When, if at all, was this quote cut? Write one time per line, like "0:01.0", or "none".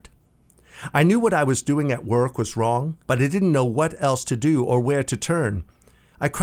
0:00.9
0:03.0